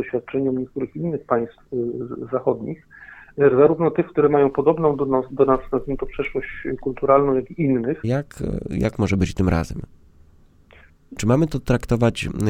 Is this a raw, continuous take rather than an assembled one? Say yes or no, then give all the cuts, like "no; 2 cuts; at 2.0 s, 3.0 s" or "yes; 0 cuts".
no; 2 cuts; at 8.0 s, 11.2 s